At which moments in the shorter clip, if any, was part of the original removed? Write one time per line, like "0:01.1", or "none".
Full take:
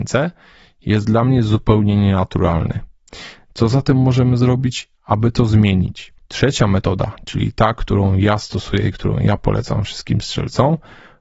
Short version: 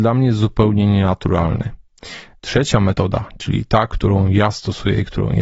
0:02.3